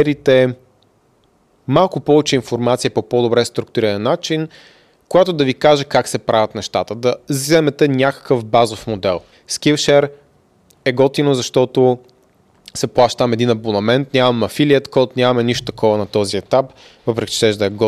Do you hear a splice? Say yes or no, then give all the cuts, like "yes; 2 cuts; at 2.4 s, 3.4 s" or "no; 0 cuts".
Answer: yes; 1 cut; at 9.3 s